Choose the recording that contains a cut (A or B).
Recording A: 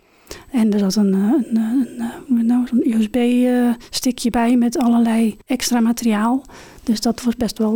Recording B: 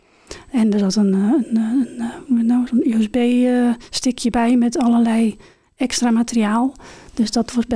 A